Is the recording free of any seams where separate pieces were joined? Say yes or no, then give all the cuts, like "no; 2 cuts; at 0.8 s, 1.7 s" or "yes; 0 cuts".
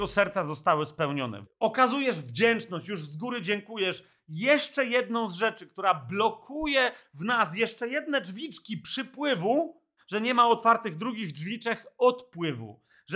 no; 2 cuts; at 1.4 s, 10.0 s